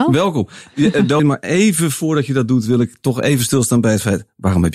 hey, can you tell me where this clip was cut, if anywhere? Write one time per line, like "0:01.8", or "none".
0:01.2